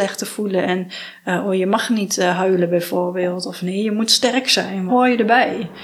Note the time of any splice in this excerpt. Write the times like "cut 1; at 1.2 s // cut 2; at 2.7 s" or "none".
cut 1; at 4.9 s